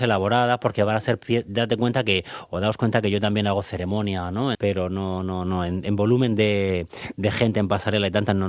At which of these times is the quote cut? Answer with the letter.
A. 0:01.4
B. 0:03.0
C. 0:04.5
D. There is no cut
C